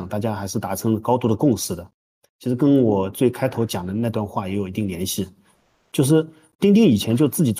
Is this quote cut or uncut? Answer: uncut